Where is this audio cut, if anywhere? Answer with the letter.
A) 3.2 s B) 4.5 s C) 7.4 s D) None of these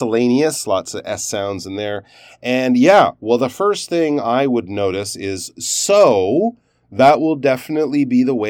D